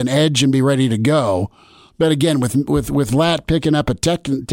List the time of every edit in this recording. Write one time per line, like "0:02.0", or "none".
none

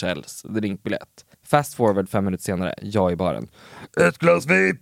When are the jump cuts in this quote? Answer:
0:01.3

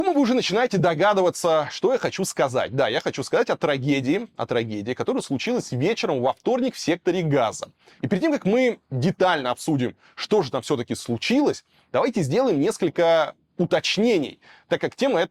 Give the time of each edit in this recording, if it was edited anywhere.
none

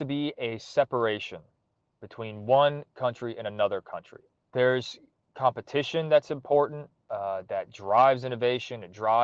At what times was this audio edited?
0:04.4

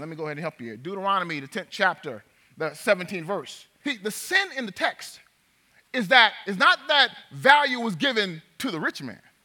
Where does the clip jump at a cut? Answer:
0:03.8

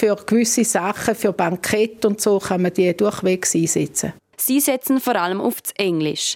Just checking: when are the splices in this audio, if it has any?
0:04.3

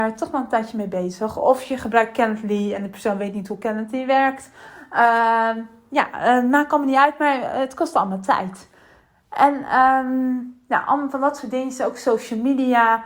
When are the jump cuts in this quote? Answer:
none

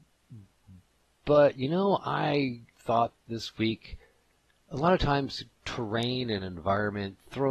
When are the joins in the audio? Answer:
0:02.7

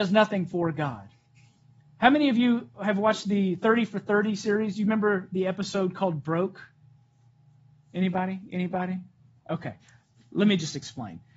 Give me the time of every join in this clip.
none

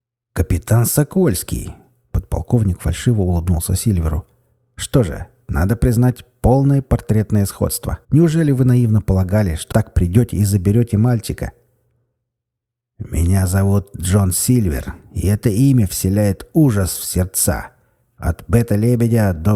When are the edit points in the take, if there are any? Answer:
0:08.0
0:09.7

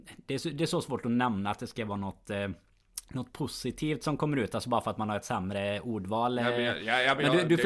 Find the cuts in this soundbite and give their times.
none

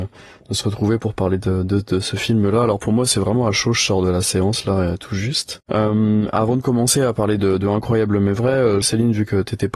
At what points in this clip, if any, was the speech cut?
0:05.6
0:08.8

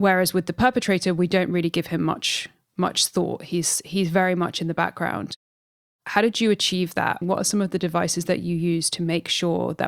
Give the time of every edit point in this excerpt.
0:07.2

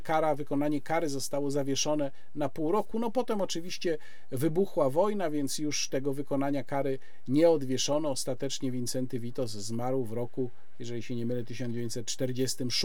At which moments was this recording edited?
none

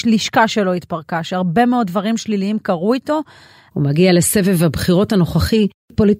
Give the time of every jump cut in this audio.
0:03.7

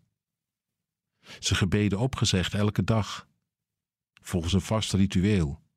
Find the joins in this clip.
none

